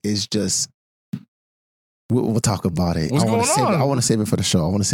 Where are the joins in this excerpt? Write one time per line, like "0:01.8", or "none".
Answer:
none

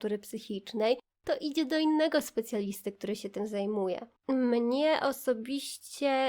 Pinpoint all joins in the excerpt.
0:04.2

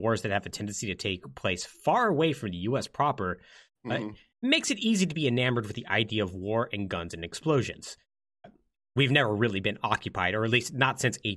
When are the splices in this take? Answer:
none

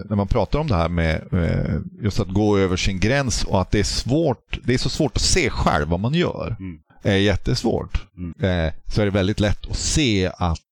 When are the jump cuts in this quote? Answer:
0:06.9
0:08.3

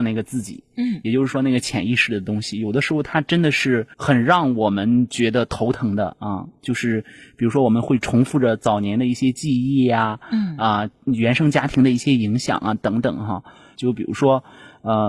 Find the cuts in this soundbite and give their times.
0:03.9
0:13.7

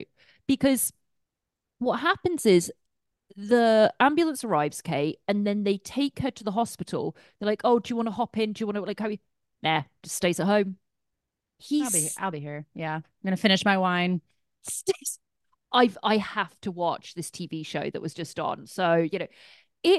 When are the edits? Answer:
none

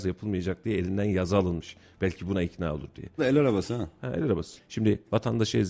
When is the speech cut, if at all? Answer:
0:03.2
0:04.6

